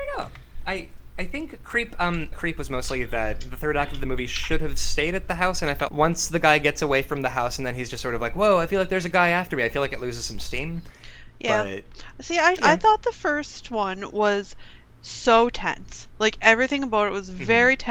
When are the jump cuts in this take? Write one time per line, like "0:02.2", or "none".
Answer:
0:02.3
0:05.9
0:12.6